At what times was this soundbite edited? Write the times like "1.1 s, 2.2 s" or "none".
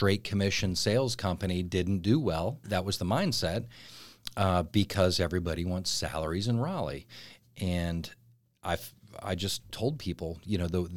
2.6 s